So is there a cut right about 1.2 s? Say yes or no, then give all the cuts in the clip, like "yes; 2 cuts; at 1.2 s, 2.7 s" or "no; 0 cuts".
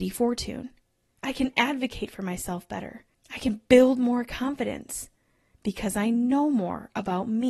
yes; 1 cut; at 1.2 s